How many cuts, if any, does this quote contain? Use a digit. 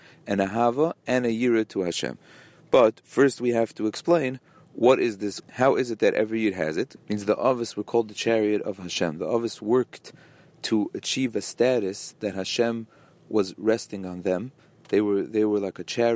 2